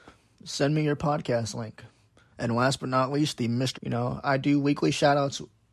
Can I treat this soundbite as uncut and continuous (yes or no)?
no